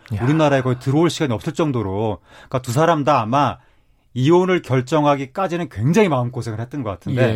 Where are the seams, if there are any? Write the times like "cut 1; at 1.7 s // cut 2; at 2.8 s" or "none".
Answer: none